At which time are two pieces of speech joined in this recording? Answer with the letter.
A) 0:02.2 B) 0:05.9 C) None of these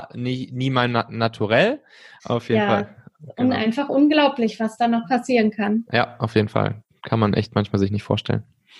A